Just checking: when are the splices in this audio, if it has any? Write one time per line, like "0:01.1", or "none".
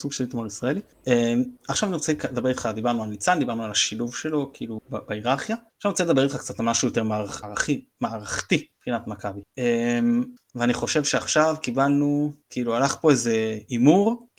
0:07.4
0:10.5